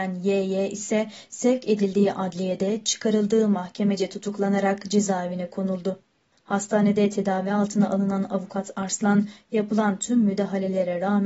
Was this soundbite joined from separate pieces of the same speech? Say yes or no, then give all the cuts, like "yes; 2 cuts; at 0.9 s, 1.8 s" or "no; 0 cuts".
yes; 1 cut; at 6.3 s